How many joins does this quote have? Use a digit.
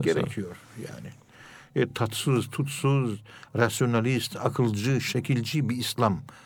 0